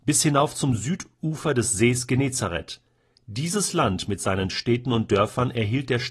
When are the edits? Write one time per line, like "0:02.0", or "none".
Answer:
none

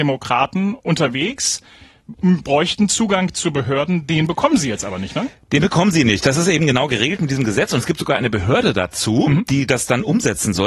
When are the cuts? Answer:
none

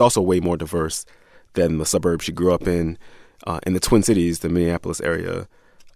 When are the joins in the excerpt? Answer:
none

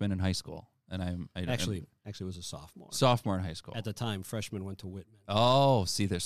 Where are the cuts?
none

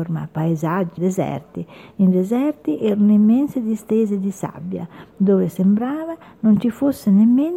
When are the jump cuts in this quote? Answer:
0:01.0

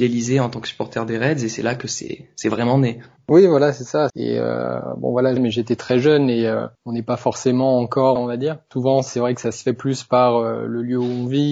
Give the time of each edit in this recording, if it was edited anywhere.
0:04.1
0:05.4
0:08.2

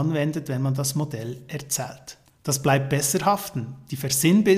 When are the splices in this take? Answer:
0:02.3

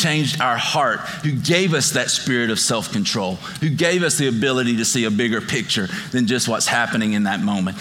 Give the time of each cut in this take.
none

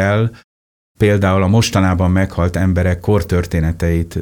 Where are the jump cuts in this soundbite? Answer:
none

